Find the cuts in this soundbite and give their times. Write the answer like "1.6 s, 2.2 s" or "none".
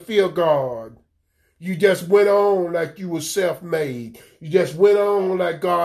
none